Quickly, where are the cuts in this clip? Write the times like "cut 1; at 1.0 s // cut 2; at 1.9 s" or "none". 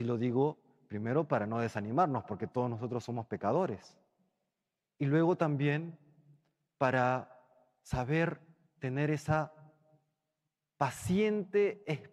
none